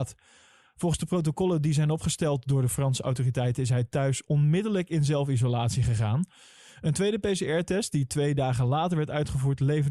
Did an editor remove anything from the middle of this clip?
no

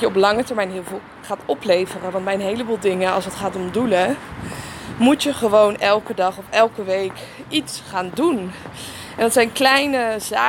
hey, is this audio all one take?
yes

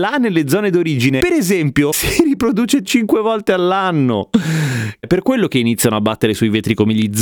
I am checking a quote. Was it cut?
yes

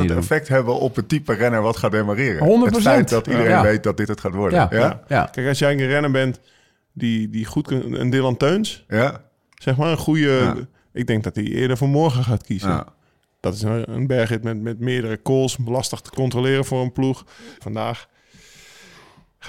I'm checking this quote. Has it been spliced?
yes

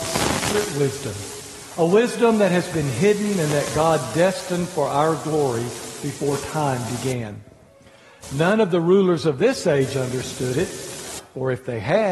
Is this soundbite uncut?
yes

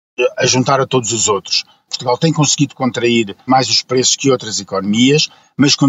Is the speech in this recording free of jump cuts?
no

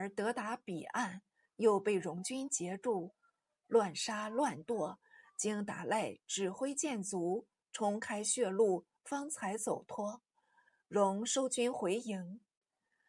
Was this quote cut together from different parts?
no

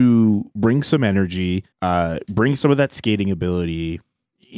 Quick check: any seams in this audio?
yes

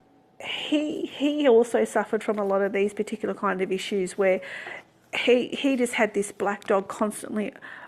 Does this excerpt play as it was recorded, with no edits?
yes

